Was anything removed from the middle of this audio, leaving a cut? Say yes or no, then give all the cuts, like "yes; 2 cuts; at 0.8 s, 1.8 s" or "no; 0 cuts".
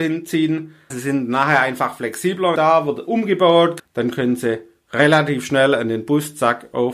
yes; 3 cuts; at 0.9 s, 2.6 s, 3.8 s